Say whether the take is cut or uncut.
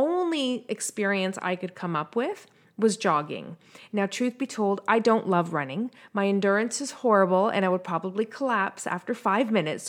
uncut